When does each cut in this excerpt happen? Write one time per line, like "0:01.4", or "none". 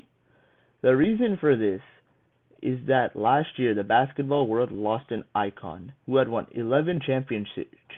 0:06.0

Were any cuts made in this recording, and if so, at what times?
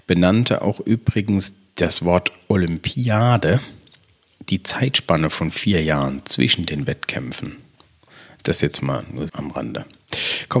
0:09.3

